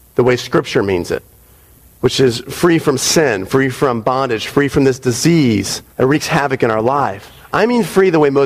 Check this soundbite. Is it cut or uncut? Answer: cut